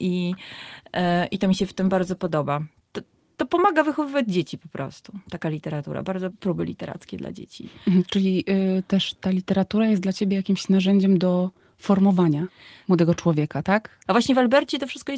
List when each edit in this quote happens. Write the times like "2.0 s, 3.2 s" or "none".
6.3 s, 14.1 s